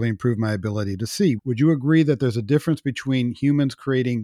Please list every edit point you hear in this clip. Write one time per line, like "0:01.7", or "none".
0:01.4